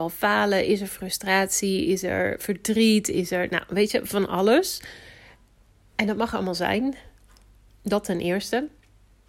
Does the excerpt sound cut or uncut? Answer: uncut